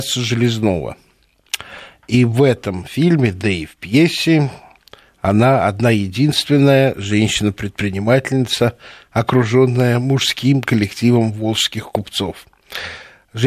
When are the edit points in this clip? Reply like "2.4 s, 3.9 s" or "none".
none